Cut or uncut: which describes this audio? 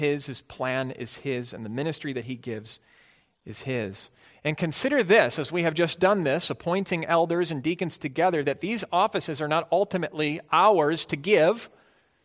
uncut